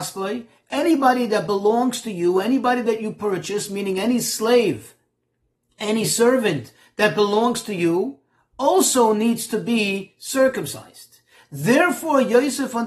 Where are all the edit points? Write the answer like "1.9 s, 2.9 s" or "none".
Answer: none